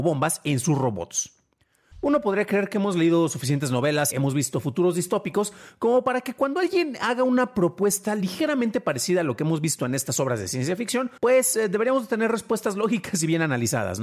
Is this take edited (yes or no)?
yes